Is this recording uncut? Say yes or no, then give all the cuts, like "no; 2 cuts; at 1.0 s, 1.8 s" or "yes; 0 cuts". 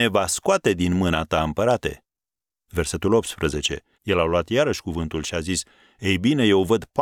no; 2 cuts; at 2.6 s, 3.9 s